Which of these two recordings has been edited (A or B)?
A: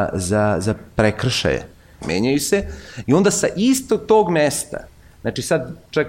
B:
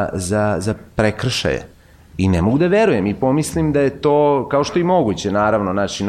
A